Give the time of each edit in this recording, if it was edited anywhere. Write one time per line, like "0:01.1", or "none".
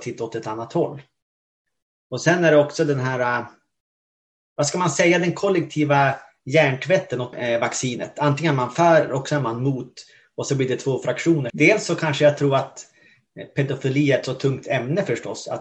0:07.3
0:11.5